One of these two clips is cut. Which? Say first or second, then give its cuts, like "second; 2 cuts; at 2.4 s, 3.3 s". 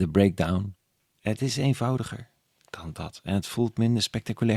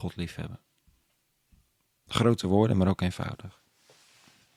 first; 1 cut; at 1.2 s